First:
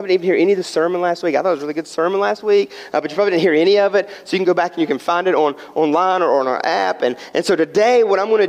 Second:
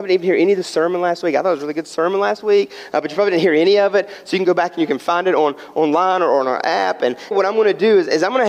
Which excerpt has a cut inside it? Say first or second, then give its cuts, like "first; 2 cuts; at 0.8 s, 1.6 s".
second; 1 cut; at 7.3 s